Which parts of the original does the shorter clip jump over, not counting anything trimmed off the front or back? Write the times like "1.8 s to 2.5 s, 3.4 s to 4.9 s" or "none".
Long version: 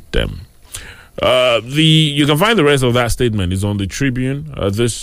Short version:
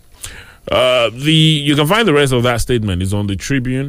none

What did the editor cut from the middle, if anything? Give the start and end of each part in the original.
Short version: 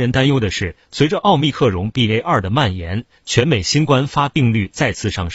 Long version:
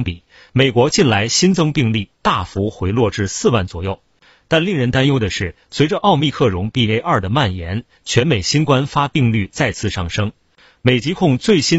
none

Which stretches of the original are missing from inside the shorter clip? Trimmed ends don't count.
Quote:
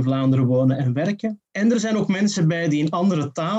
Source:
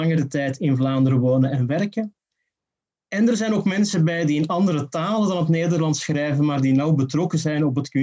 2.2 s to 3.0 s

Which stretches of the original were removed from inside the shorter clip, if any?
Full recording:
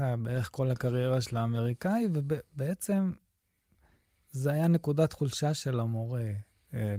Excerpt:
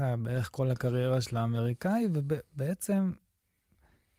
none

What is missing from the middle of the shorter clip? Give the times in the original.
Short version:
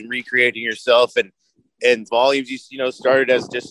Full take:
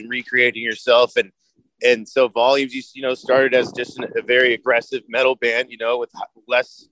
2.1 s to 2.3 s

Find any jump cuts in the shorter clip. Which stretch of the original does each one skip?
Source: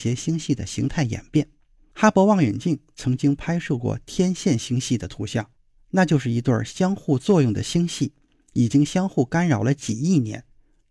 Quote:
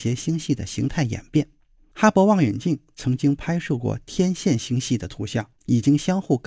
5.6 s to 8.5 s

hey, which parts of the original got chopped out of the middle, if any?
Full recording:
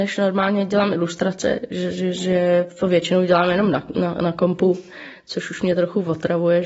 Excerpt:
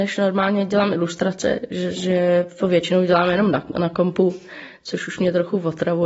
1.9 s to 2.1 s, 3.9 s to 4.2 s

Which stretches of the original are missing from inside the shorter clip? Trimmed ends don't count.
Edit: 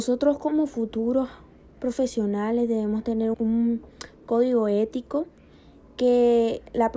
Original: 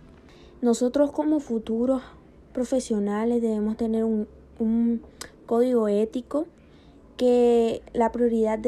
4.1 s to 4.5 s

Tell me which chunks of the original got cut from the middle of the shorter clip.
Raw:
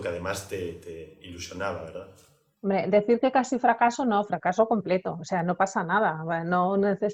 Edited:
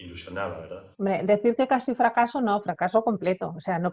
2.2 s to 2.6 s

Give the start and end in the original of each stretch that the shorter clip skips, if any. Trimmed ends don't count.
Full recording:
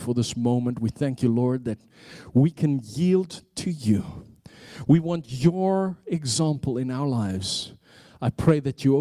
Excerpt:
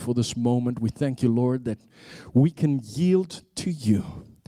none

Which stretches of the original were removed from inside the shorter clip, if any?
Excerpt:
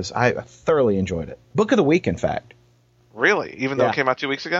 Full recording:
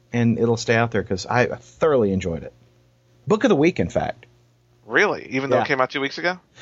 2.6 s to 3.2 s

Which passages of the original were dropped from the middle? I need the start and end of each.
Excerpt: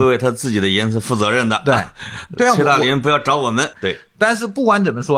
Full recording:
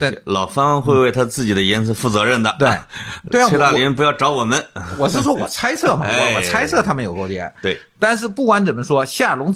4.7 s to 7.5 s

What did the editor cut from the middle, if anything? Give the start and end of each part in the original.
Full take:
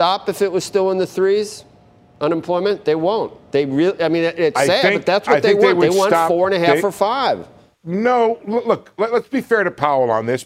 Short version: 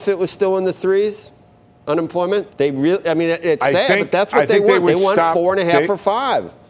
2.8 s to 3.4 s

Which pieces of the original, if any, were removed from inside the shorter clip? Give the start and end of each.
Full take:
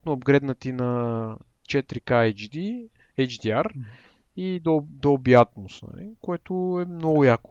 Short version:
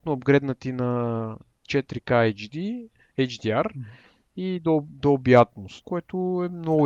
5.8 s to 6.2 s

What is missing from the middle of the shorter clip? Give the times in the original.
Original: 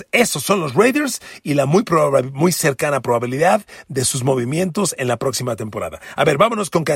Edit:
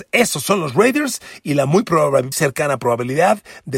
2.3 s to 2.5 s

